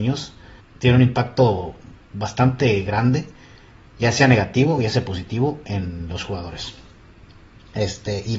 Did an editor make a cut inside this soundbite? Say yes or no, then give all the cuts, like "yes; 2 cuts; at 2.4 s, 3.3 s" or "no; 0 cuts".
no; 0 cuts